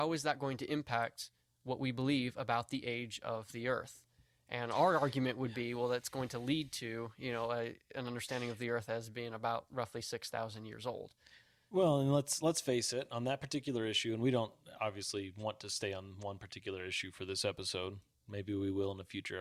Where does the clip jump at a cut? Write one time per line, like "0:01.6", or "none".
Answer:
none